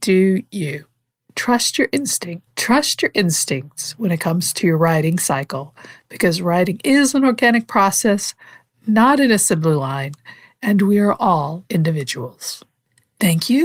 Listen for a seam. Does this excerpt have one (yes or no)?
yes